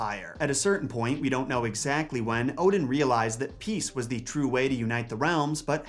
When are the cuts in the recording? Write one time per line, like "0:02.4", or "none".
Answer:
none